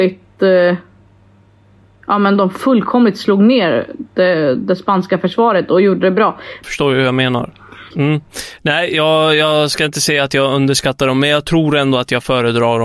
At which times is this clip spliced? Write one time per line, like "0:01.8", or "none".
0:06.6
0:07.9